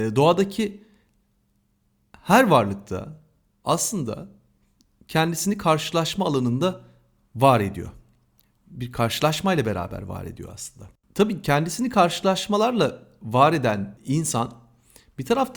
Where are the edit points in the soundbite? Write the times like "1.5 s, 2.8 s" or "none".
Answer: none